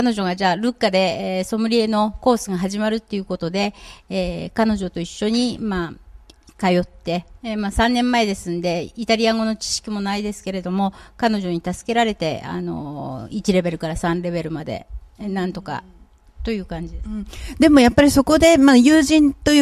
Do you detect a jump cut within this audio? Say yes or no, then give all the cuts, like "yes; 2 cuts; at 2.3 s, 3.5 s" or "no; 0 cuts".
no; 0 cuts